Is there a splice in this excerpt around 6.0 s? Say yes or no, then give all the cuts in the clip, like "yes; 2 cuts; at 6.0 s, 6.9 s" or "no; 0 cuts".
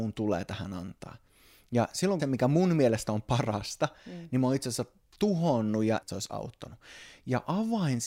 yes; 2 cuts; at 2.2 s, 6.0 s